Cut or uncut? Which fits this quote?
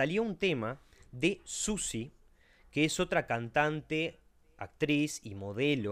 uncut